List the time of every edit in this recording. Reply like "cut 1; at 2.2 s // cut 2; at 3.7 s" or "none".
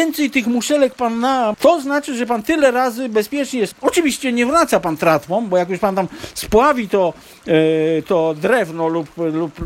cut 1; at 1.5 s // cut 2; at 3.7 s